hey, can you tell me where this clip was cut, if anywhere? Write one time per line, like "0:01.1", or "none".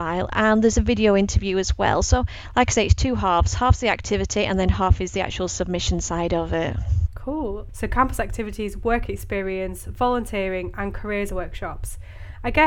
0:07.7